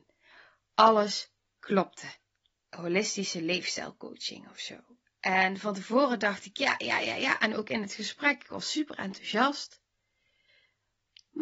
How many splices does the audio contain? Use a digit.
2